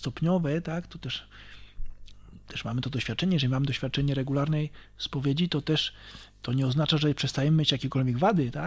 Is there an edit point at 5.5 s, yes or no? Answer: no